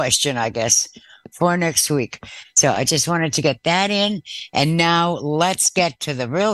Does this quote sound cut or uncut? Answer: uncut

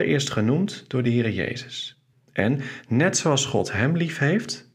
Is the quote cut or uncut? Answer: cut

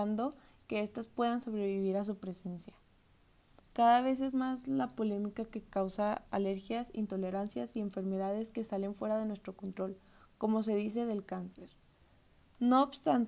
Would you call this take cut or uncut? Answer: cut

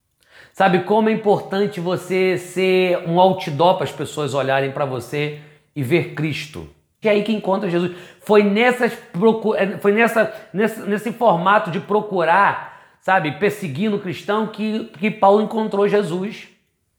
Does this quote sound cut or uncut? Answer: cut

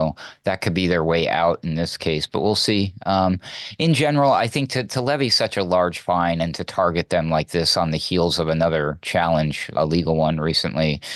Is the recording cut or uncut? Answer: cut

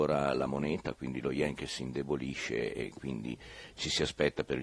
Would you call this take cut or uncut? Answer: uncut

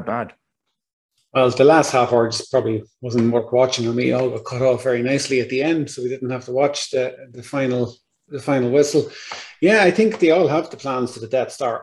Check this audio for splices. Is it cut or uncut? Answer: uncut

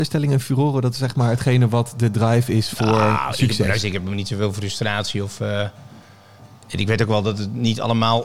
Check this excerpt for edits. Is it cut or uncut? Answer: uncut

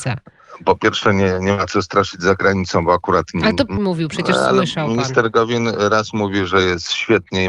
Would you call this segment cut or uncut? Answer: cut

